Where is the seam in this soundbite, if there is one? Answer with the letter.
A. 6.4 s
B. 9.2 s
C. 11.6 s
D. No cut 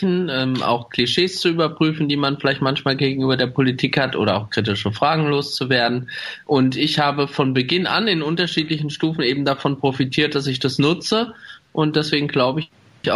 D